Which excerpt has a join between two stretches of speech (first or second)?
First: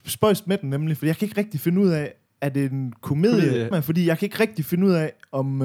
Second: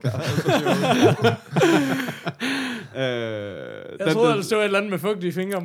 first